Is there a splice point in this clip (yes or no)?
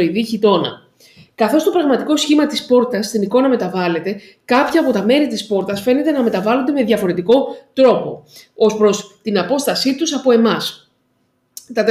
no